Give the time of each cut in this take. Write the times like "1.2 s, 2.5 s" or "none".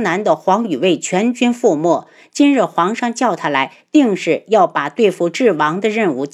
none